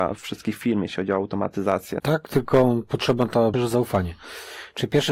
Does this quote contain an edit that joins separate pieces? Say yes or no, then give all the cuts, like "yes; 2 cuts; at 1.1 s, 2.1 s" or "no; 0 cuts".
yes; 2 cuts; at 2.0 s, 3.5 s